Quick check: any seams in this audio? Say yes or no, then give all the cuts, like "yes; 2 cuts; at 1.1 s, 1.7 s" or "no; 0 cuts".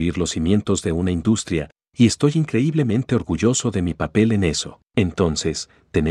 yes; 1 cut; at 4.9 s